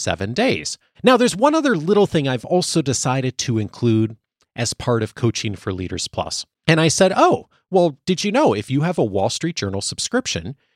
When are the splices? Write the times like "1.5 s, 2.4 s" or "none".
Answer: 0.9 s, 6.6 s